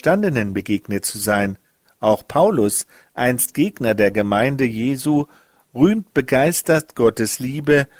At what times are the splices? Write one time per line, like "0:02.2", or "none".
0:01.8